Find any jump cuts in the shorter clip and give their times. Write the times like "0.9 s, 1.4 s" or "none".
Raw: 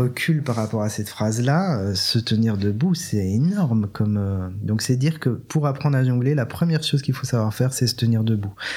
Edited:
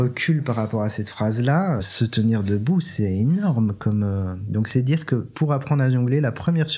1.8 s